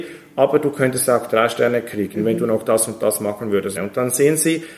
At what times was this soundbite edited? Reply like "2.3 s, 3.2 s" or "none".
3.7 s